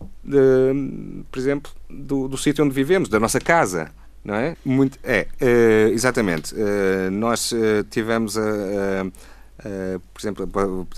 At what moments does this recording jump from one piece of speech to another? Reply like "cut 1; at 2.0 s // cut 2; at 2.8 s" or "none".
cut 1; at 4.5 s